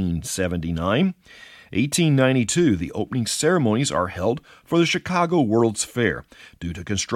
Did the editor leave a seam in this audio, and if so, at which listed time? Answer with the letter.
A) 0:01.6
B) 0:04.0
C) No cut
C